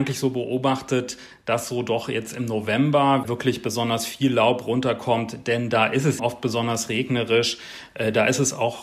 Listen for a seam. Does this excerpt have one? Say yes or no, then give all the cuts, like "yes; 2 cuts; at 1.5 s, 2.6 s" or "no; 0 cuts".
yes; 1 cut; at 6.2 s